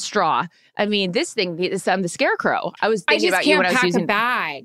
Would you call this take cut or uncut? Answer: cut